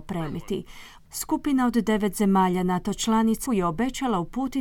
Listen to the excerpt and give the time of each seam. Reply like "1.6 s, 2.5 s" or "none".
1.0 s, 3.5 s